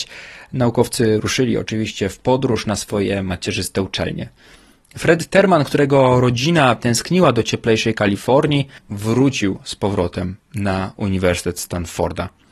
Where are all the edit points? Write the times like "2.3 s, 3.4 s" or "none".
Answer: 8.8 s